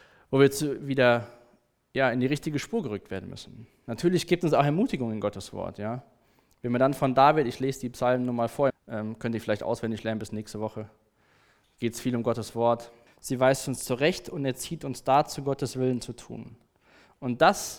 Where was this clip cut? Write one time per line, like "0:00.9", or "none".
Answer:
0:08.7
0:13.1